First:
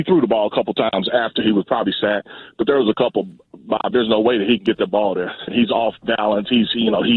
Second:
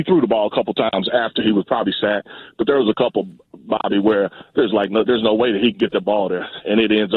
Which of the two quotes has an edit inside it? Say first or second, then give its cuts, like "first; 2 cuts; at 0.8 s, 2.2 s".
first; 2 cuts; at 3.9 s, 5.5 s